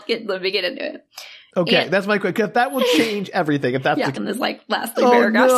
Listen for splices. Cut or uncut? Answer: cut